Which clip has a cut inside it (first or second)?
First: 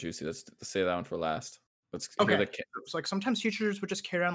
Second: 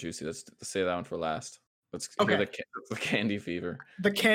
first